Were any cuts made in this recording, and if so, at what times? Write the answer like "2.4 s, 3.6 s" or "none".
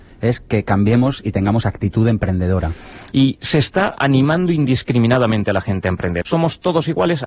3.1 s, 6.2 s